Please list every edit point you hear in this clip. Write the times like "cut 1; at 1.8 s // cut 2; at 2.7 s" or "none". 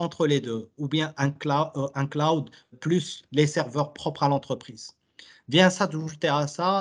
cut 1; at 2.7 s